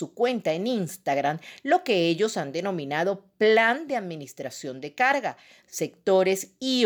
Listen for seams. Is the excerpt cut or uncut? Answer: cut